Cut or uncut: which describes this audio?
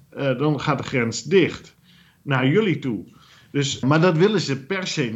cut